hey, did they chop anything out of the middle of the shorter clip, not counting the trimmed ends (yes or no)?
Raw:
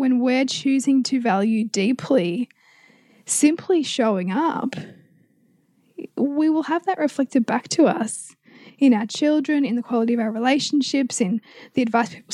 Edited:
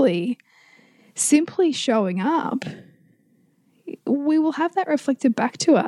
no